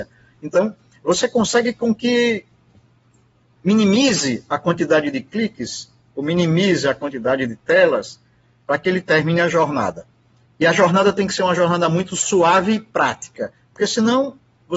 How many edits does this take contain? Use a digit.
0